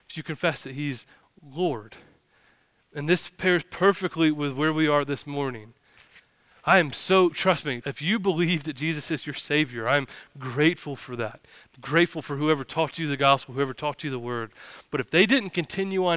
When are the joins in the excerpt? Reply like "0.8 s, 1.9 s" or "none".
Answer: 7.8 s